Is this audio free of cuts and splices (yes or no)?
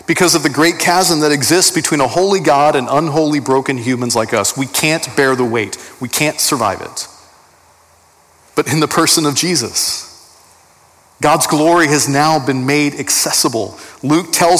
yes